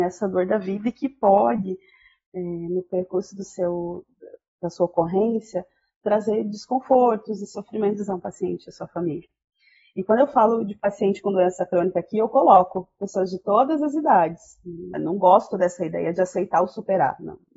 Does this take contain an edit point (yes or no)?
yes